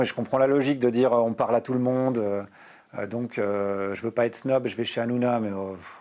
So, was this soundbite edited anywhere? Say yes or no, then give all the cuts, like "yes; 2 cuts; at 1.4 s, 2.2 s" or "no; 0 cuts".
no; 0 cuts